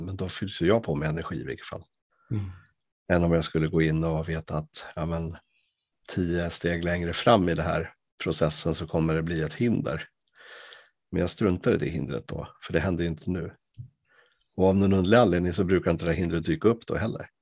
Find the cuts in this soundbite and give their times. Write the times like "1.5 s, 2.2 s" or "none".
none